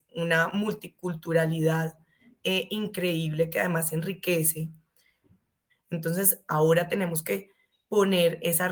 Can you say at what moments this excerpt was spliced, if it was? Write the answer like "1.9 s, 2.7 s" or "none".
5.7 s

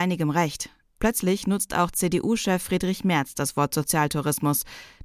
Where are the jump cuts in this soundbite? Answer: 1.0 s

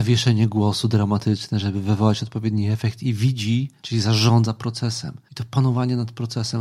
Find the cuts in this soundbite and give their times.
3.8 s, 5.3 s

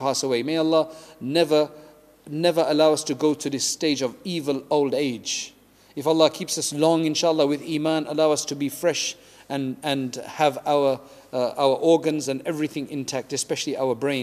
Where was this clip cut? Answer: none

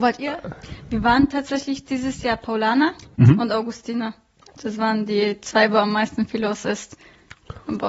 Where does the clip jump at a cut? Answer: none

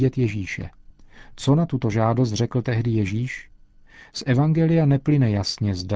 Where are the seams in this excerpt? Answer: none

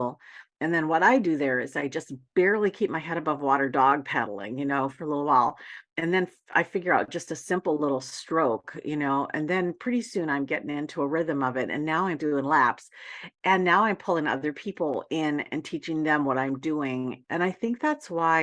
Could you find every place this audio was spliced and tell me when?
17.2 s

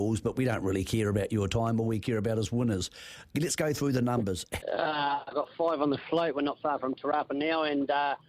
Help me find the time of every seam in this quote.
4.6 s

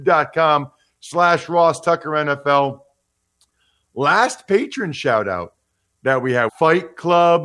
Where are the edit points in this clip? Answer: 6.5 s

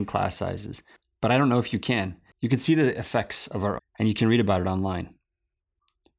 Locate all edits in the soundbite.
2.3 s, 3.8 s

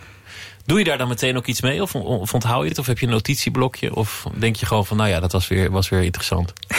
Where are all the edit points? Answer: none

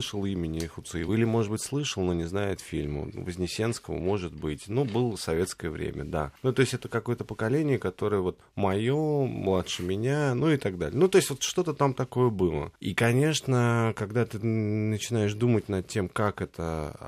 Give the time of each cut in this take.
none

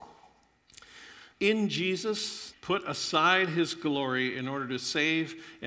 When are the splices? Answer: 1.3 s, 2.5 s

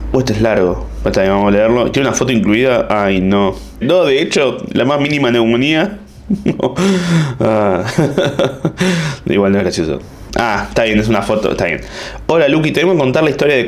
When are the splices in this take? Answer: 3.8 s, 10.3 s

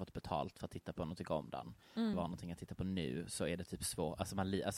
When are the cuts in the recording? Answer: 2.1 s

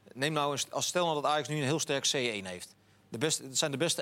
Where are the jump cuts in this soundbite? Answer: 3.0 s

